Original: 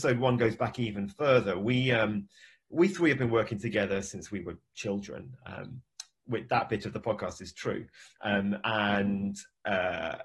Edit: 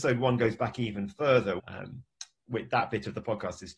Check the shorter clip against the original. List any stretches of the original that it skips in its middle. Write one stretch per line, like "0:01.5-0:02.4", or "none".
0:01.6-0:05.4